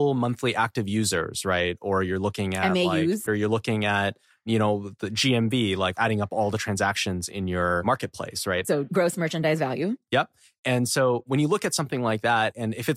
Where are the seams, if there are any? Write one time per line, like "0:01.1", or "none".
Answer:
0:03.3